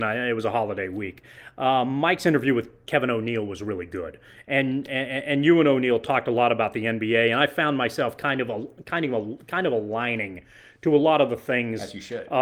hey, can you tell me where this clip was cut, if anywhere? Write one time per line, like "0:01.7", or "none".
none